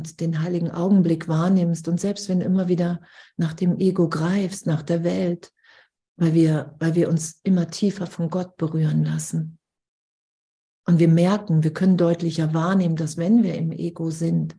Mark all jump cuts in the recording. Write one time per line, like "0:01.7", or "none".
0:06.0